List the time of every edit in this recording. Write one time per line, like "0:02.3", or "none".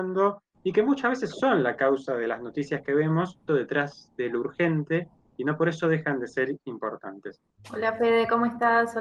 0:03.5
0:07.5